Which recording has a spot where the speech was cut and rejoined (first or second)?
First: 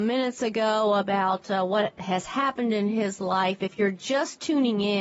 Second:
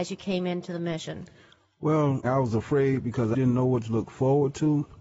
second